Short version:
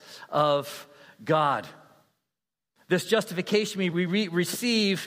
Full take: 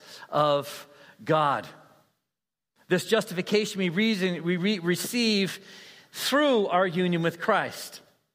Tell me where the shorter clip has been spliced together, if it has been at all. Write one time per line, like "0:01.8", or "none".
0:03.9